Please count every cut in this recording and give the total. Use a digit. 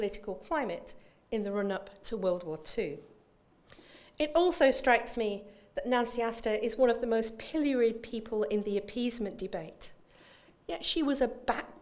0